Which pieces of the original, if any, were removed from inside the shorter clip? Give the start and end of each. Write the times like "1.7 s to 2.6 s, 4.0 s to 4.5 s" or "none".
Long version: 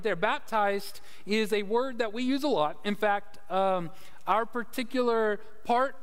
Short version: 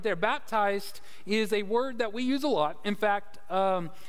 none